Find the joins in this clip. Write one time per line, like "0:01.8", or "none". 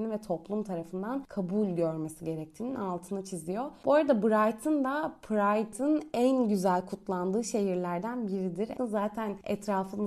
0:08.8

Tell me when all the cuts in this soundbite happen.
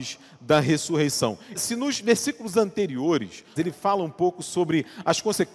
0:01.5
0:03.6

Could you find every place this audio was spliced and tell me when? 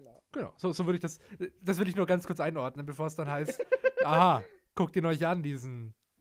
none

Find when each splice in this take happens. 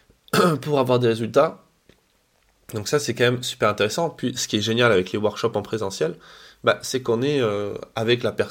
none

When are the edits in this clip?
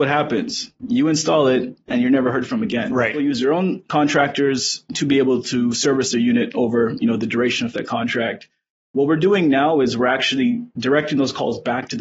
none

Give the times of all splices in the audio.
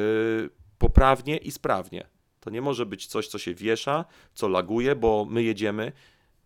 none

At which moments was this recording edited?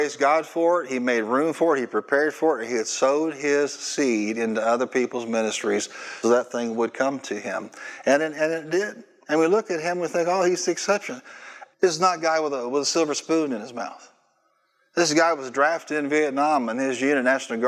0:06.2
0:11.7

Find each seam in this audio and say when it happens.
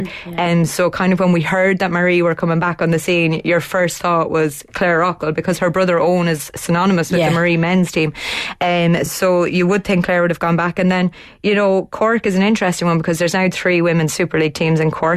none

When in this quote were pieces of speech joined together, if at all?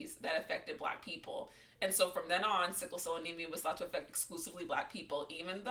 none

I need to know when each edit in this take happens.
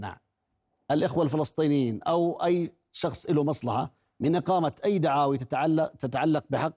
none

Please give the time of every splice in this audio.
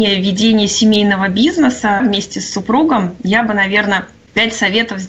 0:02.0

